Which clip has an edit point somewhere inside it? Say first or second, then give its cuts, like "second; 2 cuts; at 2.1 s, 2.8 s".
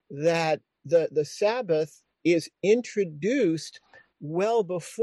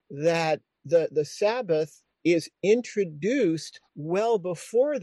second; 1 cut; at 3.9 s